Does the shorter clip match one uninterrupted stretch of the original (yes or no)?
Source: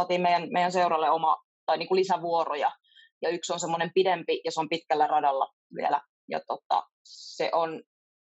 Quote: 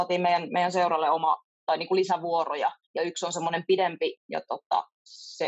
no